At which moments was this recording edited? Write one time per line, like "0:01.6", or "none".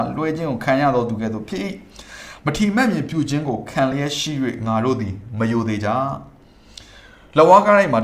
none